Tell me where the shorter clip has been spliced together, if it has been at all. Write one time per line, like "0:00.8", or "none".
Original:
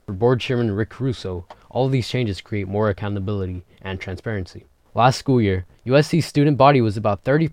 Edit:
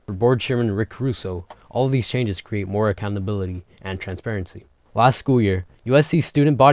none